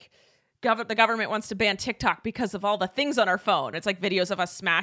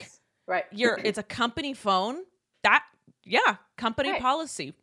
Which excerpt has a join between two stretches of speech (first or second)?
first